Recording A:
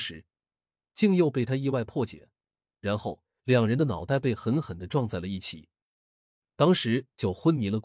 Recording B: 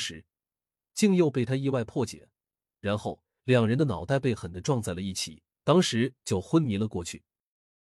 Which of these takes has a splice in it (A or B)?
B